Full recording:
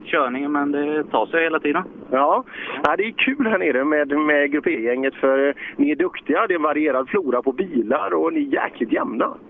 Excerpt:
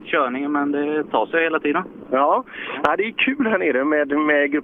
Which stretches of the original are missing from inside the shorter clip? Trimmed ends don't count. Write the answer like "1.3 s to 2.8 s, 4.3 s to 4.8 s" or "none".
none